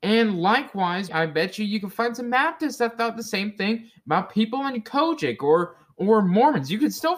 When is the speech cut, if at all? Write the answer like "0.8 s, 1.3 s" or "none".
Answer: 1.1 s